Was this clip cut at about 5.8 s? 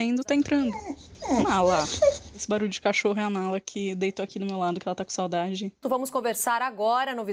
yes; 2 cuts; at 2.3 s, 5.8 s

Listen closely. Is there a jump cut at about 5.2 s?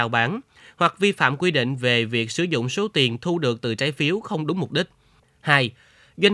yes; 1 cut; at 5.2 s

